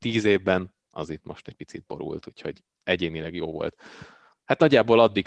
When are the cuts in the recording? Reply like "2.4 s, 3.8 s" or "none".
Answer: 4.3 s